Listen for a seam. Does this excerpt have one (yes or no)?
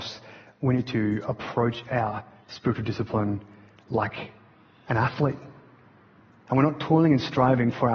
yes